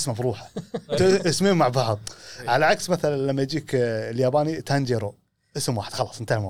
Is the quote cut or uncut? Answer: cut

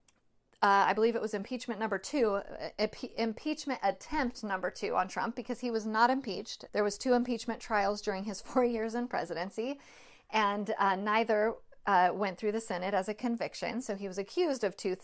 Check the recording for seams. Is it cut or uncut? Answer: cut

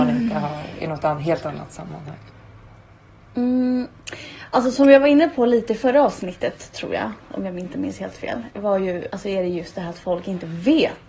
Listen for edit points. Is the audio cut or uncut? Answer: uncut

